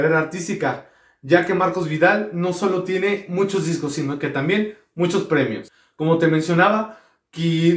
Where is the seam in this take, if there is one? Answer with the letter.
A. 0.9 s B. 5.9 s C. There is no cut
C